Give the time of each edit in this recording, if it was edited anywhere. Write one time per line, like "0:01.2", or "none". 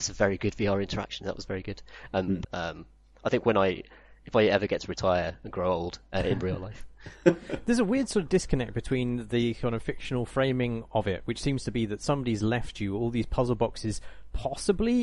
0:02.4
0:06.1

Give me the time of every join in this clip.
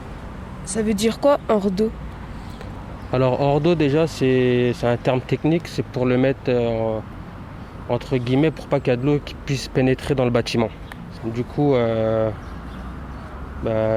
0:11.2

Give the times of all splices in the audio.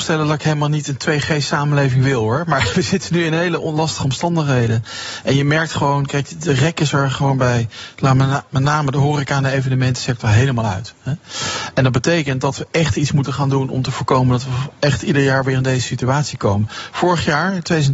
none

